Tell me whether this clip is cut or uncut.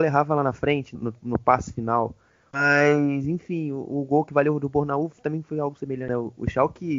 cut